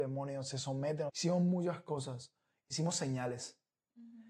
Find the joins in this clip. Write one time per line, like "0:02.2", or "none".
0:01.1